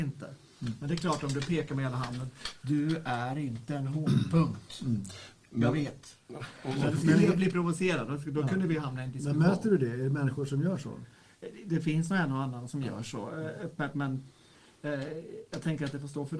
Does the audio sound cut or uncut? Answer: uncut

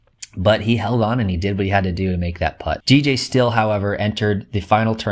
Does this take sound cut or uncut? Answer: cut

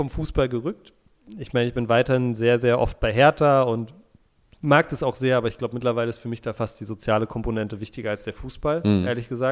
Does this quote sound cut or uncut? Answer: uncut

